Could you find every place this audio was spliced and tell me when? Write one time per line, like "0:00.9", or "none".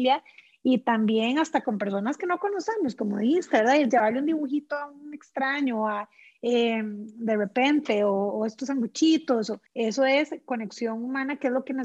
0:09.7